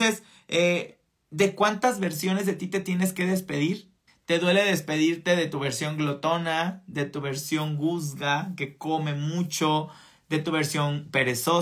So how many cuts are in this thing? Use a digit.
1